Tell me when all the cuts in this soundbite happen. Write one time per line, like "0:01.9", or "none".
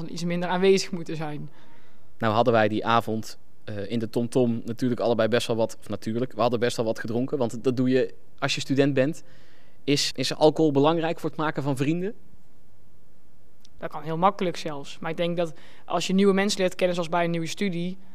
0:10.1
0:13.8